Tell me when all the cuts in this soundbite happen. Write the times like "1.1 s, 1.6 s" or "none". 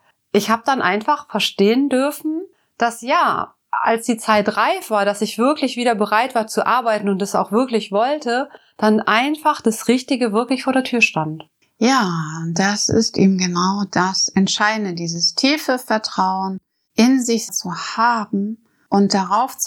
none